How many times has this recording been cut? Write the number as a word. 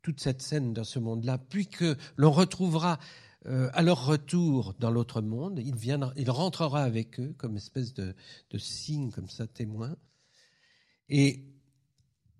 zero